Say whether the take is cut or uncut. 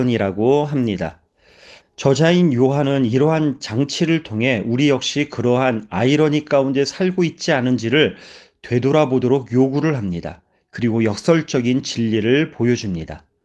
cut